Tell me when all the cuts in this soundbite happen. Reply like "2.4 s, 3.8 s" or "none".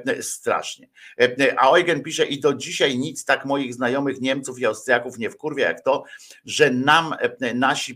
none